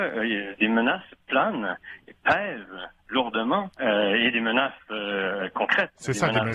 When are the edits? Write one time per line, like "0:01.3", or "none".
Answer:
0:03.7